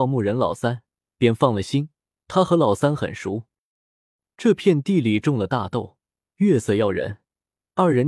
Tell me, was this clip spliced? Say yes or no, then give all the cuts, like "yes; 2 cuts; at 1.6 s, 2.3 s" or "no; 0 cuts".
no; 0 cuts